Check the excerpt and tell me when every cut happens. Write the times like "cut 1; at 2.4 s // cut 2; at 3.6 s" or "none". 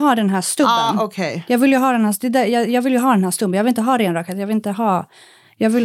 none